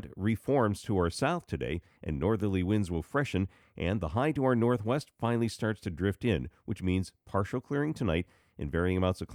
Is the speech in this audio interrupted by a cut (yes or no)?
no